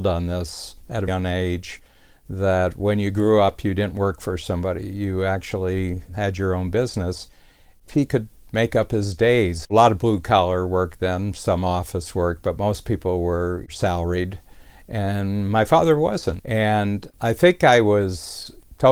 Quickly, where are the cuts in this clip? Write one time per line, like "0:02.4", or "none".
0:01.1
0:09.6
0:16.4